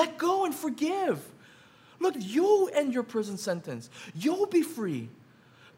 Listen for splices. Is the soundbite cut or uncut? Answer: cut